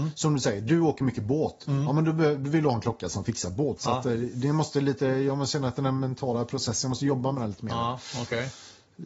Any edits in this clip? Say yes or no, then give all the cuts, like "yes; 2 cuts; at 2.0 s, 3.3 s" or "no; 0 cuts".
yes; 1 cut; at 3.8 s